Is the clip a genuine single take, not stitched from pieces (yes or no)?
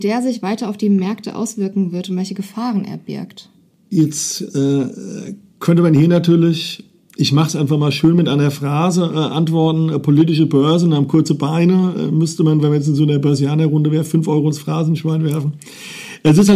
yes